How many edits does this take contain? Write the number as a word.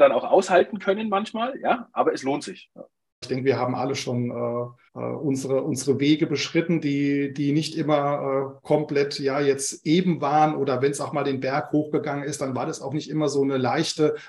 two